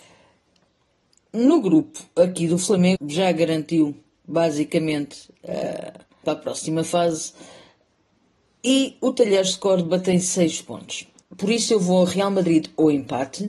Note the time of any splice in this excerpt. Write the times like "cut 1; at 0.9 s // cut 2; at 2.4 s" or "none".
cut 1; at 3.0 s // cut 2; at 6.2 s // cut 3; at 11.2 s

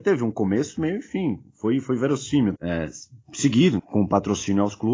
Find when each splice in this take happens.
cut 1; at 2.6 s // cut 2; at 3.8 s

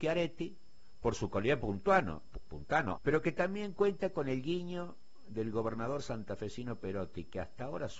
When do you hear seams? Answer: cut 1; at 3.0 s

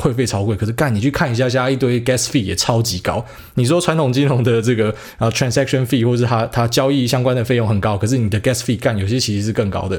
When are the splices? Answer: none

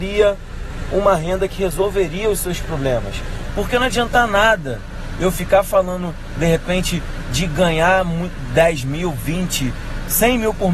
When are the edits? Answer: cut 1; at 3.5 s

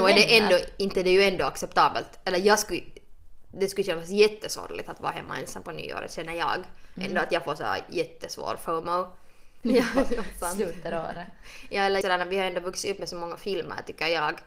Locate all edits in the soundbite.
cut 1; at 9.6 s // cut 2; at 12.0 s

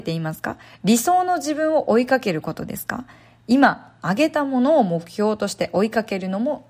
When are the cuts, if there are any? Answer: none

